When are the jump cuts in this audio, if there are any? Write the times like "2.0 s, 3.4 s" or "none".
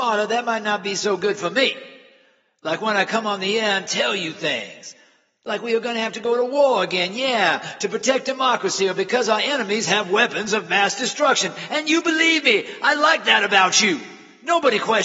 none